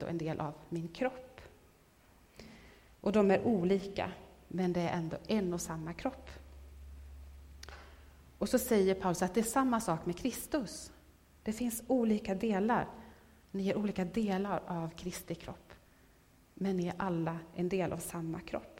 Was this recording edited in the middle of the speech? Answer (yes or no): no